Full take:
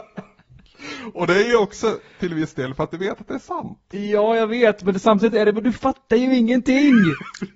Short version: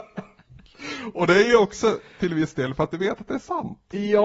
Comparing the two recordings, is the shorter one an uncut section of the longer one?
yes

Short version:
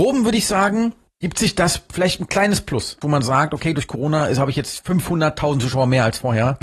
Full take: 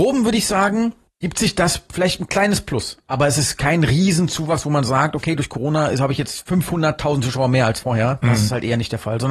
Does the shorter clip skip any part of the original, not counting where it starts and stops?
yes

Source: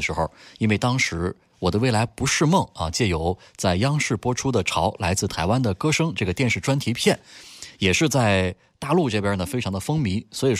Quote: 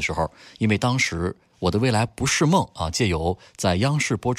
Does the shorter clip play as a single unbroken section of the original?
yes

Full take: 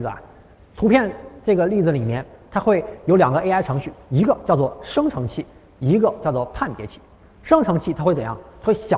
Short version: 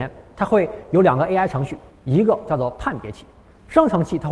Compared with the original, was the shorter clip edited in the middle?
yes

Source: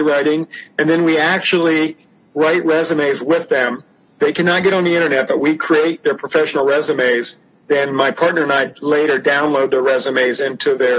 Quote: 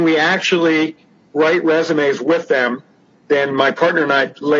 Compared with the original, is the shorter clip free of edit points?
no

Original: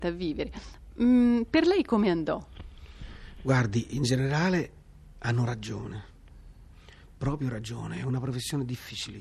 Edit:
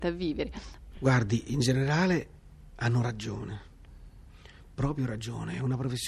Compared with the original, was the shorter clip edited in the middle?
yes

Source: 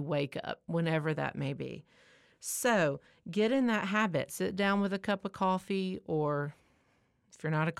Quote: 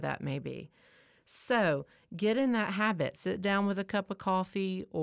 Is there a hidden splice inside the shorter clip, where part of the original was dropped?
no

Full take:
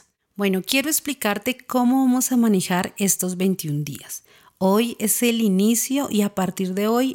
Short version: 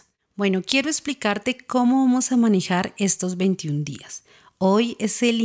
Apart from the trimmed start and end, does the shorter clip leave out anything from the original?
no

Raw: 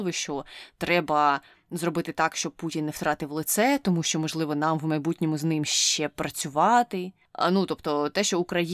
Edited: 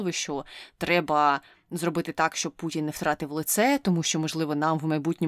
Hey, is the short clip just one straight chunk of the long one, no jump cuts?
yes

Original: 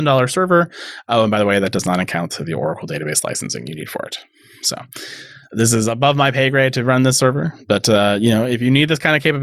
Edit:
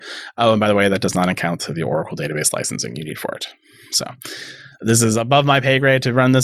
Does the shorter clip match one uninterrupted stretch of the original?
yes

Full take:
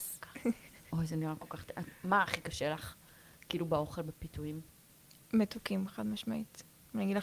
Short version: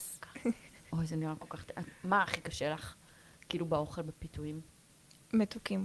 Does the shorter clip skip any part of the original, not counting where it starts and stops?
no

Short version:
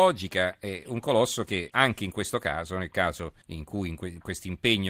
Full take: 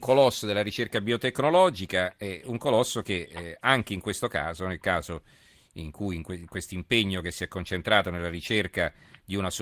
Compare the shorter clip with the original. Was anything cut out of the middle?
yes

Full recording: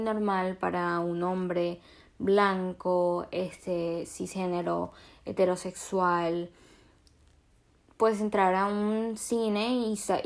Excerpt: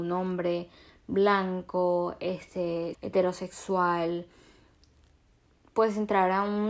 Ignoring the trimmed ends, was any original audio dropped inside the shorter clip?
yes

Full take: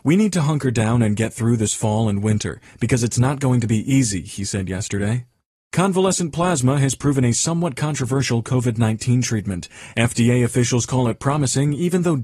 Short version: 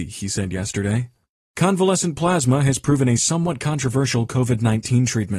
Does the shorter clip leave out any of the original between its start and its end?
no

